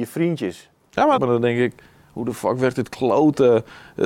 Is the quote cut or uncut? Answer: cut